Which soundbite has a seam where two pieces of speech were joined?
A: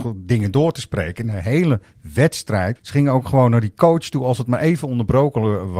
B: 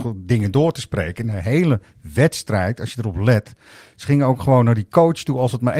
A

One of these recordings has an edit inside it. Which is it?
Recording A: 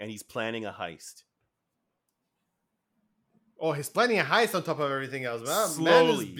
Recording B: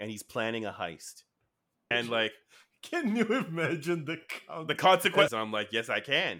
B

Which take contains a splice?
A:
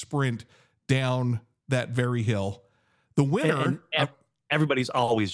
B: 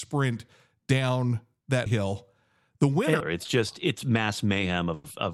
B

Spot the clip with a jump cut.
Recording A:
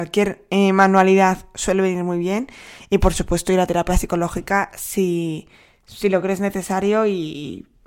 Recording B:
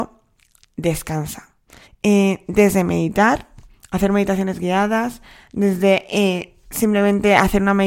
B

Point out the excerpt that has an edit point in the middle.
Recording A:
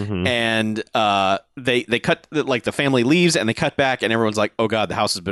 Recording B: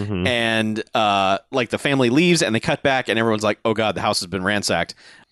B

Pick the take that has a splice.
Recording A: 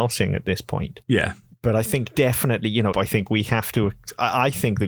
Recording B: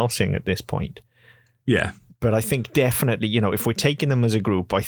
A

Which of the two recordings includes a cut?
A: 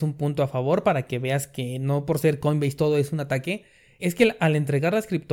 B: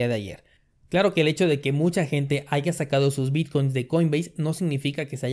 A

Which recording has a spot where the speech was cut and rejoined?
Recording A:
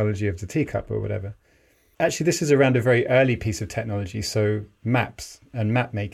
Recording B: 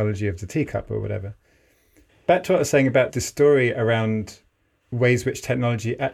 A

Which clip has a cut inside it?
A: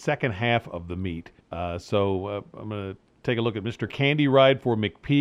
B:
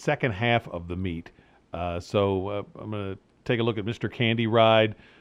A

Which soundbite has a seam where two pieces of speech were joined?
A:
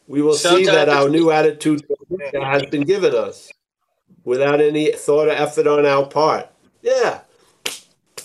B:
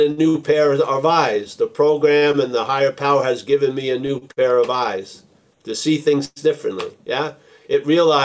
A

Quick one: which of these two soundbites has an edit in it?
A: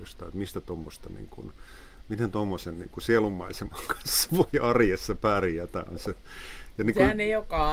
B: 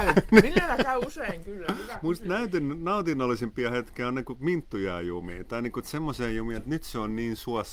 B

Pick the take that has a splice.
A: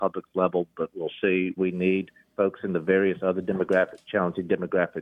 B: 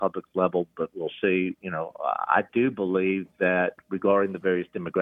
A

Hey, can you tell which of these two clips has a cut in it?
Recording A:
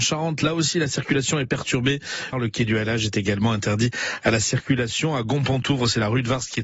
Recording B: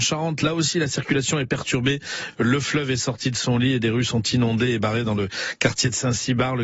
A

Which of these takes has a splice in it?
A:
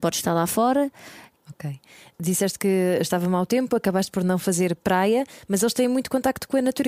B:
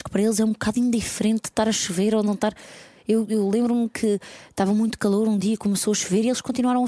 A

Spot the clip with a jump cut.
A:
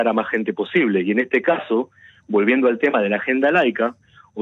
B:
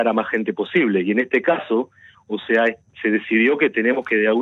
B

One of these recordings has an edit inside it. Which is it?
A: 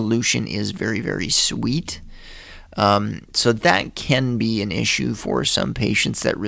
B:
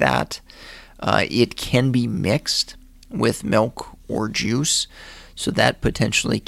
B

